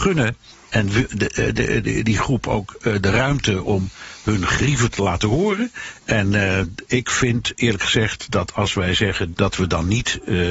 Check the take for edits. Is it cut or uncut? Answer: cut